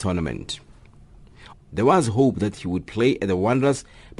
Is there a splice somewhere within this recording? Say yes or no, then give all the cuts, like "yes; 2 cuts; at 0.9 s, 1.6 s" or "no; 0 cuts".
yes; 1 cut; at 1.5 s